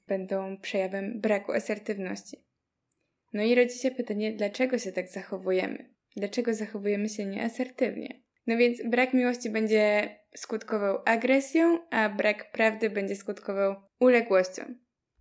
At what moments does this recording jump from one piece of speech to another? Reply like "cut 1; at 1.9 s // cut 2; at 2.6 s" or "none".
cut 1; at 8.4 s // cut 2; at 13.9 s